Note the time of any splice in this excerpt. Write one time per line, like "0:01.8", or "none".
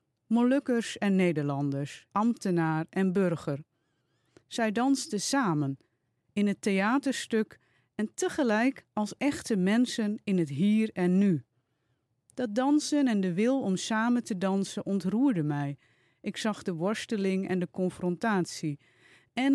0:02.1